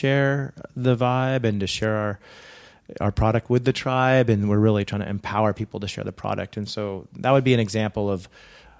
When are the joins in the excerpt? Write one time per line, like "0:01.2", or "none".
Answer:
none